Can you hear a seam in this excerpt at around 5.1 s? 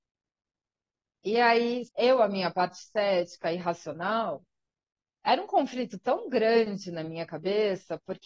no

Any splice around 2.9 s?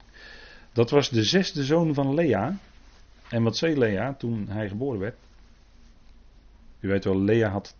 no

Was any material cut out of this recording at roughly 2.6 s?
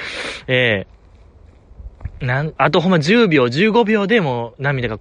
yes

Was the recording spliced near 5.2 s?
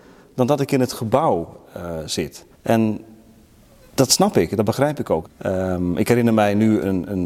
yes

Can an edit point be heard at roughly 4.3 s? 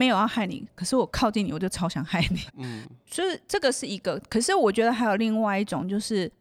no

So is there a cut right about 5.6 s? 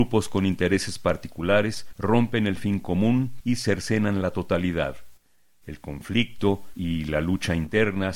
no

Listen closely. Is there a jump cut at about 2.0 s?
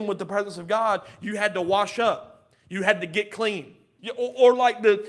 no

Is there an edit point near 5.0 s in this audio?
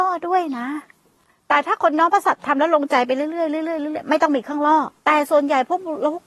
yes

